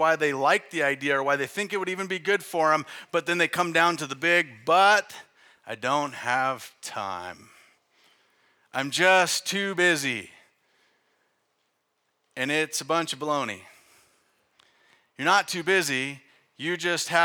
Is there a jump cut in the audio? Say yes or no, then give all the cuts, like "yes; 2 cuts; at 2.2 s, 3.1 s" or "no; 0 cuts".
no; 0 cuts